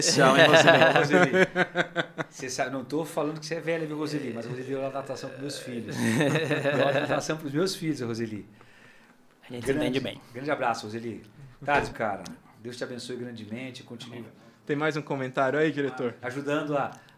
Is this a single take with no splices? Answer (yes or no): no